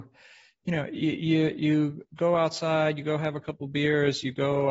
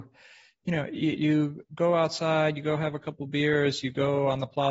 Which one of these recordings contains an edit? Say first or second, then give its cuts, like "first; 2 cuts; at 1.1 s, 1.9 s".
second; 1 cut; at 1.1 s